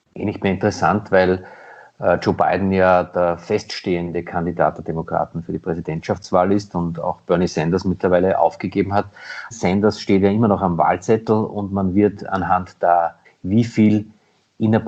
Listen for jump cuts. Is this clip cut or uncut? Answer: cut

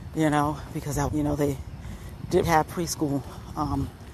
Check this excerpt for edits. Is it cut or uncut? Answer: cut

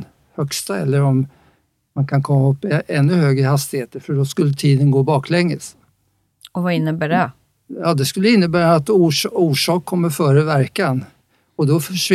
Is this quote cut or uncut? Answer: uncut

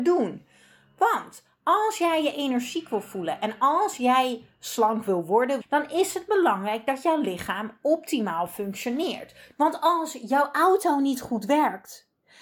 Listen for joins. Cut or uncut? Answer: cut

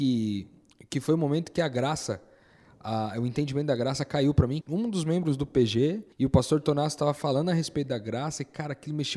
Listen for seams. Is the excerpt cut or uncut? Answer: cut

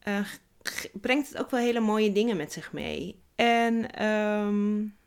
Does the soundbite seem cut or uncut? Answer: cut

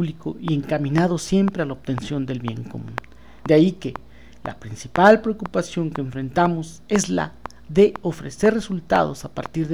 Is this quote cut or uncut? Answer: uncut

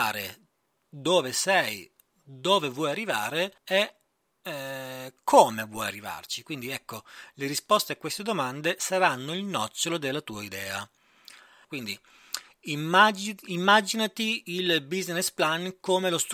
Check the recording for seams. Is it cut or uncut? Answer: cut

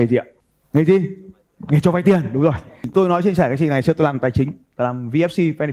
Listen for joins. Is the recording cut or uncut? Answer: uncut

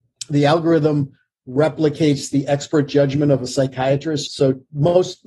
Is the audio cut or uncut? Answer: cut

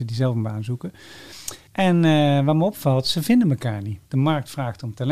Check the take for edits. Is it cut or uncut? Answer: cut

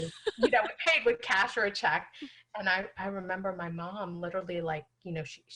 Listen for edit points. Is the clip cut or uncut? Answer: uncut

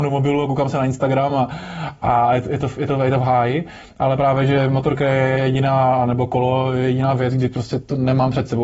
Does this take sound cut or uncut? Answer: uncut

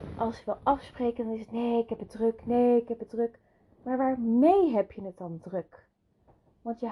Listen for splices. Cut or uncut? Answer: uncut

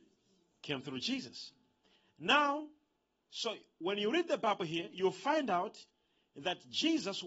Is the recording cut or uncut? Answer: uncut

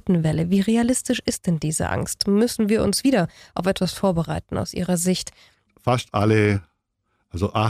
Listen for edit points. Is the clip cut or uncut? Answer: cut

